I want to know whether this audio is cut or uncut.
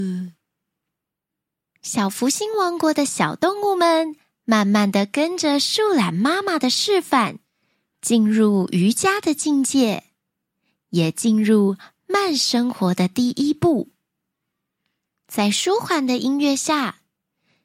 uncut